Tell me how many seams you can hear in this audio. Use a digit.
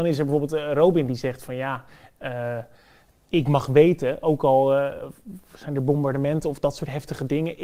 0